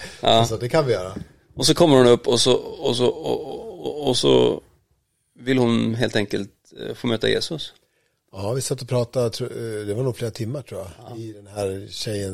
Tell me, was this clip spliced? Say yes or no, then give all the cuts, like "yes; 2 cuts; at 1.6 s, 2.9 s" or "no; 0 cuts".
no; 0 cuts